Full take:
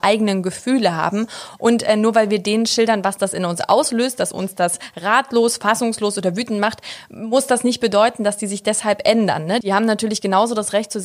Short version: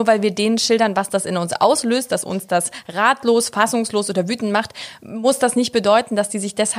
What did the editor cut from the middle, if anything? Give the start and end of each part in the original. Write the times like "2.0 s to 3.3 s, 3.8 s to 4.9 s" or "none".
none